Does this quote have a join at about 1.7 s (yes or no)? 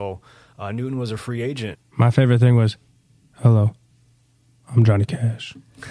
yes